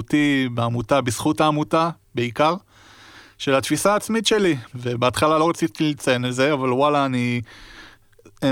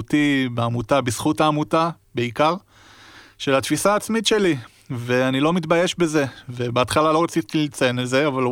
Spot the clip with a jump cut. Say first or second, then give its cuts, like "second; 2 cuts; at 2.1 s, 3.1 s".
first; 1 cut; at 4.7 s